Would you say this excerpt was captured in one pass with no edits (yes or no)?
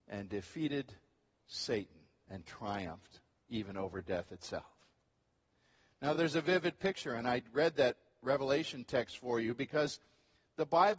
yes